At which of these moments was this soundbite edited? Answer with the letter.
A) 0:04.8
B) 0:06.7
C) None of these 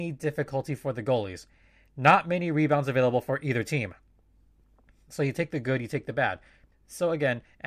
B